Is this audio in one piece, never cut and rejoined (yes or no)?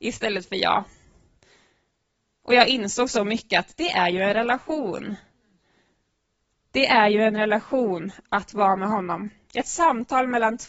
yes